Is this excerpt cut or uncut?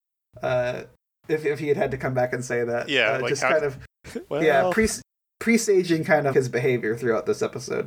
cut